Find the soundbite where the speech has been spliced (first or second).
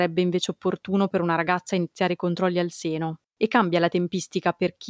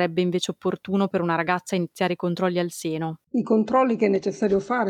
second